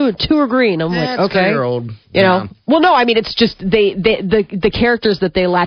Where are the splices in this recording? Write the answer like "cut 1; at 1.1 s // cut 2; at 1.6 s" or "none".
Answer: cut 1; at 2.0 s